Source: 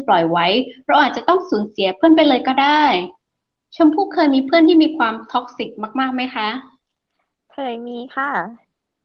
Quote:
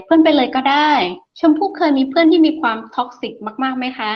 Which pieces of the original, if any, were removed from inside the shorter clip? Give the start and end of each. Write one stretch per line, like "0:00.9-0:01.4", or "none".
0:03.2-0:03.6